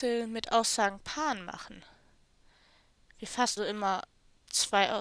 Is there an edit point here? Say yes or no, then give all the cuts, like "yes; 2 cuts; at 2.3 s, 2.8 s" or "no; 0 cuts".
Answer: yes; 1 cut; at 3.6 s